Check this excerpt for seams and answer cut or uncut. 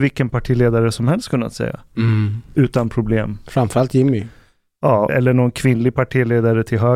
cut